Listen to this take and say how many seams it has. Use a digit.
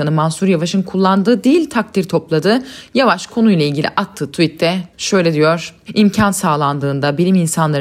1